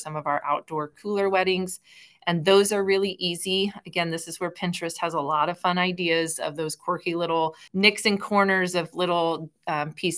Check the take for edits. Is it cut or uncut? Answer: cut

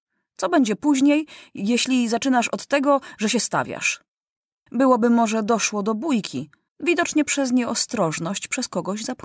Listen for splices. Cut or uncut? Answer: cut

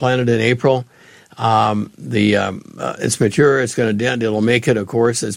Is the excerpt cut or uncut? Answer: uncut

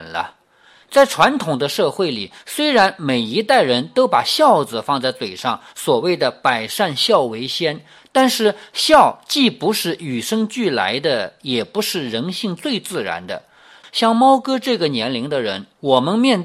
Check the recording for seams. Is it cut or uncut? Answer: cut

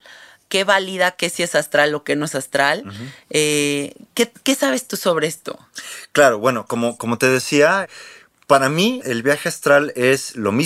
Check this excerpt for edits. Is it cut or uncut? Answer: cut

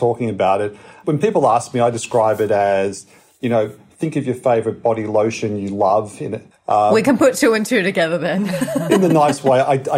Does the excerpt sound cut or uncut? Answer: cut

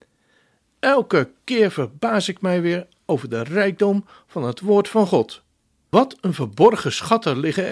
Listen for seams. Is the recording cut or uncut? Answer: uncut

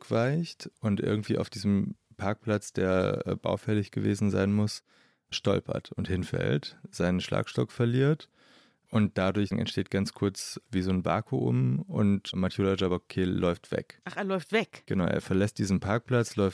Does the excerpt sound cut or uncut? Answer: uncut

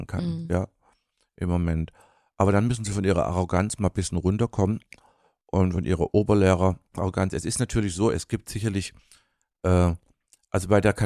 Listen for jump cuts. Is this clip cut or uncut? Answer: uncut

